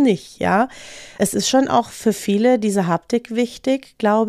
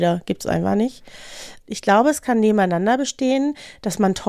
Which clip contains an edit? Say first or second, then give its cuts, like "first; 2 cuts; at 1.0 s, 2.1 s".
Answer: second; 1 cut; at 1.6 s